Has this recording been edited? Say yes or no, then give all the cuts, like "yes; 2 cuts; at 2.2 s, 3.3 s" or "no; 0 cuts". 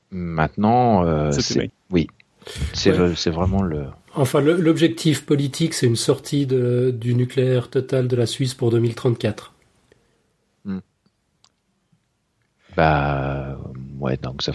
yes; 1 cut; at 1.7 s